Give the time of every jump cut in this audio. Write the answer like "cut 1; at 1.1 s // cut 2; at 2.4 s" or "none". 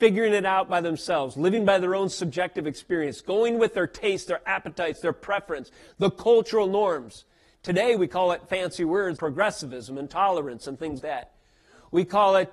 cut 1; at 9.2 s // cut 2; at 11.0 s